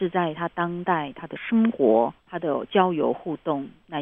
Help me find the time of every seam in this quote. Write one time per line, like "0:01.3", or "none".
0:02.2